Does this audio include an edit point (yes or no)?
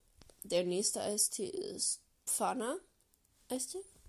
no